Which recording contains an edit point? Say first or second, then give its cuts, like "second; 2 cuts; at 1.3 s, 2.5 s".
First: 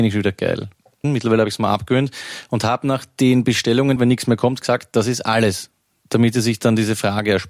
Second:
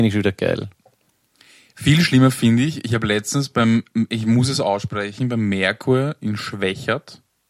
first; 2 cuts; at 1.0 s, 4.0 s